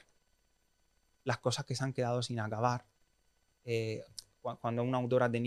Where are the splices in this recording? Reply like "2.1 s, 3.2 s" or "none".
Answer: 3.5 s